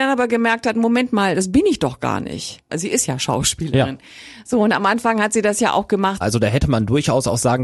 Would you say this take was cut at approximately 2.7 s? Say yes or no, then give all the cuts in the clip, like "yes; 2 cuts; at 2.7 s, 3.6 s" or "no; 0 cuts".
yes; 2 cuts; at 2.7 s, 6.2 s